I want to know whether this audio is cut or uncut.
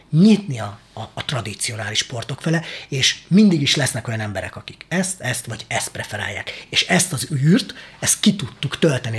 uncut